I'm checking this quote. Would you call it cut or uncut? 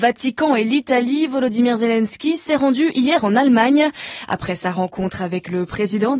uncut